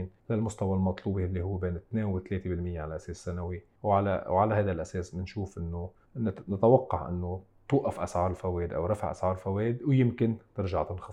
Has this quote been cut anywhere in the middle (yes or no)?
no